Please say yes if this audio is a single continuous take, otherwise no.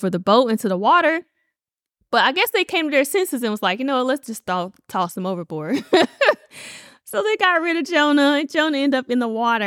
yes